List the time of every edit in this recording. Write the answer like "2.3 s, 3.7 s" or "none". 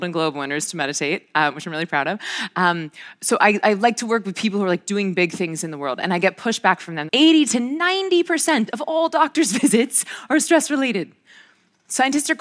7.1 s